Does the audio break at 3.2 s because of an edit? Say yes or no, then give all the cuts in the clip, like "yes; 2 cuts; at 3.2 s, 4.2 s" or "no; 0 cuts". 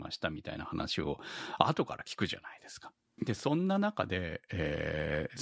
yes; 1 cut; at 3.2 s